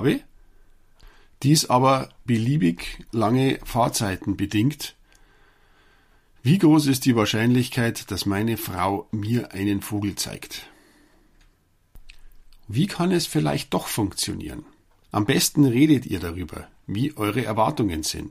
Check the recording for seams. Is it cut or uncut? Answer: cut